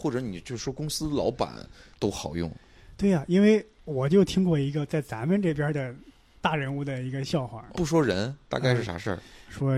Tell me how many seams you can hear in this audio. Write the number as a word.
one